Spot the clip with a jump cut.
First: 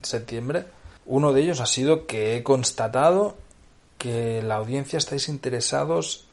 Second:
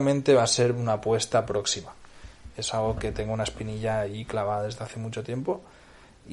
first; 1 cut; at 1.0 s

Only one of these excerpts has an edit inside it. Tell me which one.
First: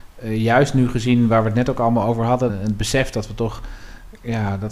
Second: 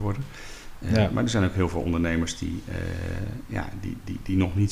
first; 1 cut; at 2.5 s

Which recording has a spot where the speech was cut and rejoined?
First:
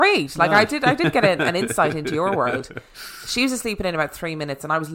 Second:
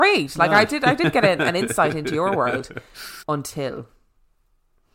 second; 1 cut; at 3.2 s

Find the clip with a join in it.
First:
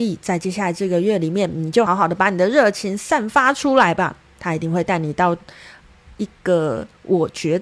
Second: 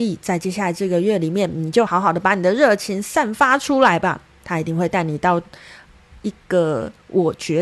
first; 1 cut; at 1.9 s

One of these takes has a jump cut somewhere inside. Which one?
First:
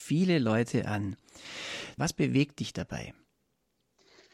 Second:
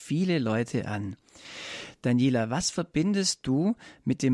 first; 1 cut; at 2.0 s

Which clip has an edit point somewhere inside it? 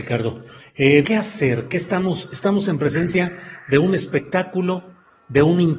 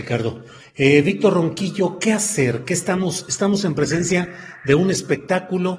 first; 1 cut; at 1.0 s

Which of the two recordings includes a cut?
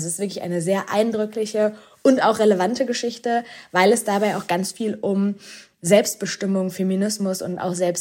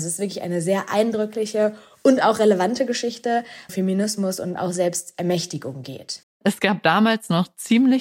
second; 1 cut; at 3.7 s

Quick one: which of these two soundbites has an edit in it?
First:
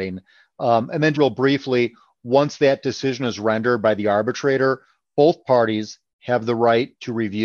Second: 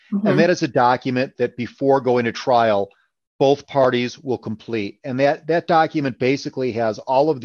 first; 1 cut; at 1.1 s

